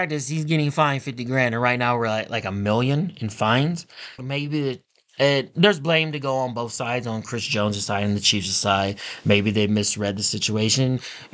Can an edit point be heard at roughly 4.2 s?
yes; 1 cut; at 4.2 s

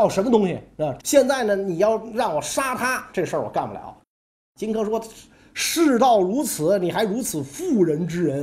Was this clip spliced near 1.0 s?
yes; 2 cuts; at 1.0 s, 3.1 s

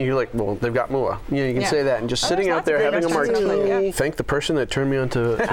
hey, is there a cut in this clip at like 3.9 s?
yes; 1 cut; at 3.9 s

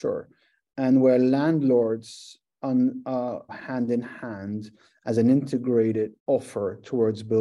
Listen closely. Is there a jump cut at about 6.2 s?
yes; 2 cuts; at 3.5 s, 6.2 s

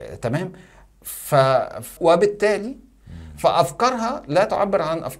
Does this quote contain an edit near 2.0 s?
yes; 1 cut; at 2.0 s

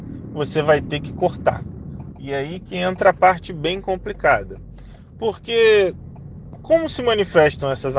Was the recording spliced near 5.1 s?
no; 1 cut; at 2.1 s

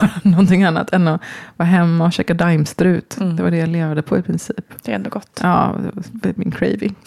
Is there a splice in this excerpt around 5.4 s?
no; 0 cuts

